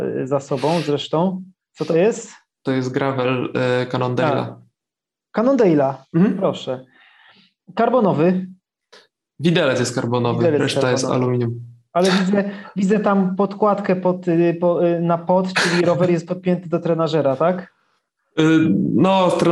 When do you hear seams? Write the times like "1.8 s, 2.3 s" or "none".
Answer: none